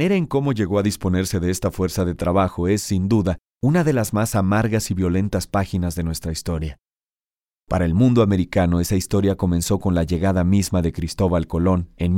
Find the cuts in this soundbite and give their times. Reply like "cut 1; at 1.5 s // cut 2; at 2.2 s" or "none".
none